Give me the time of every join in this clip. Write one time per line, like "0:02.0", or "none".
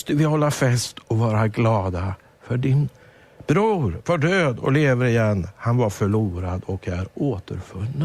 none